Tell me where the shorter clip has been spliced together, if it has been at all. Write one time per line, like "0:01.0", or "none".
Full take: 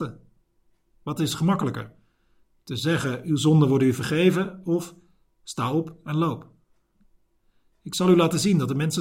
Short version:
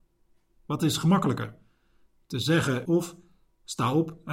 0:02.9